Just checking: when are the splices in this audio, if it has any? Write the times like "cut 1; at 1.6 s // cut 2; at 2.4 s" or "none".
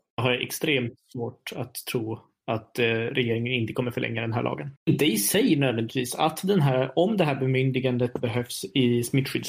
cut 1; at 4.8 s